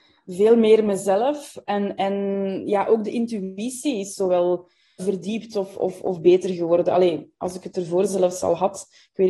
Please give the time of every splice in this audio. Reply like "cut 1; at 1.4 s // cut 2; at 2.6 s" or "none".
none